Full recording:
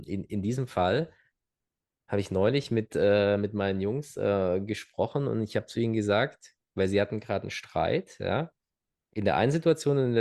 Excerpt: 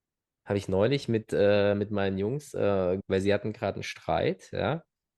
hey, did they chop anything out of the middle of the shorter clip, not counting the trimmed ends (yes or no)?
yes